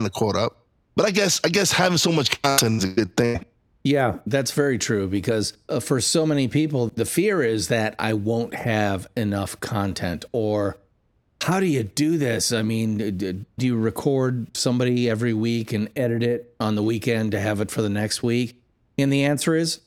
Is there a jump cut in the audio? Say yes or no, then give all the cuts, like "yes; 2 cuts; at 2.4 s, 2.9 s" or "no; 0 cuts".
yes; 1 cut; at 13.6 s